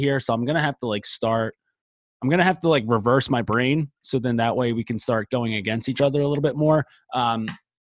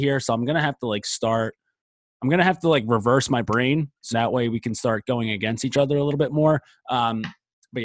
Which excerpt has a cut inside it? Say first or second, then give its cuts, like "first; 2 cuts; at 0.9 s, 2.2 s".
second; 1 cut; at 4.1 s